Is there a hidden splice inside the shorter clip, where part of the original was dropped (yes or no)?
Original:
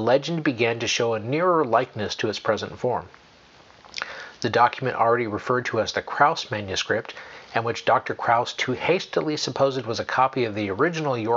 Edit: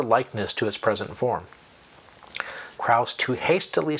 yes